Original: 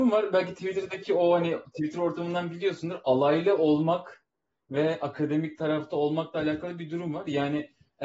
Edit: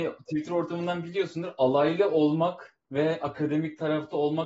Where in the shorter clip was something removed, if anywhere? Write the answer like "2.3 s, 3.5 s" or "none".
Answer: 2.8 s